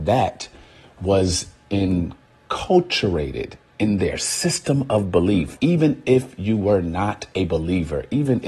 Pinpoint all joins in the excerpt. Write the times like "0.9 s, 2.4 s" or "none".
5.6 s